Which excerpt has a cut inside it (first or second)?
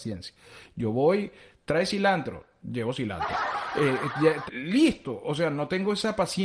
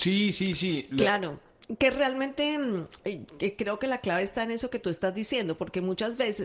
first